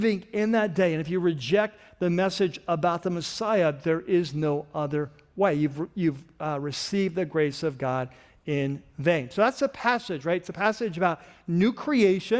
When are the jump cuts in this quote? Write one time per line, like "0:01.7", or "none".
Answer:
none